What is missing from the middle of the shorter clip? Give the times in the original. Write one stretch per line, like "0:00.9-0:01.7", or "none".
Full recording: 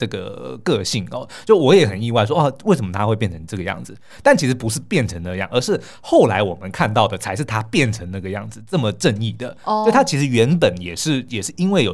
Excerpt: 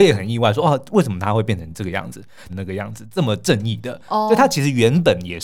0:04.2-0:08.0